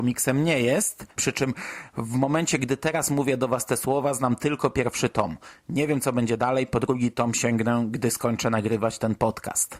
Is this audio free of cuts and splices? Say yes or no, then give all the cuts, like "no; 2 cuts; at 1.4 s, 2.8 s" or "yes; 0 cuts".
no; 1 cut; at 1.2 s